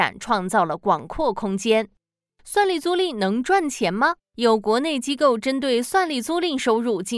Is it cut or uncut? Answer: cut